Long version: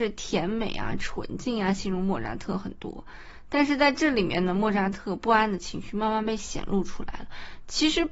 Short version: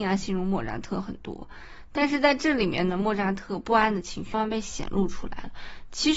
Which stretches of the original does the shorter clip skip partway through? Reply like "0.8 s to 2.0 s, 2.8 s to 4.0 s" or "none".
5.9 s to 6.1 s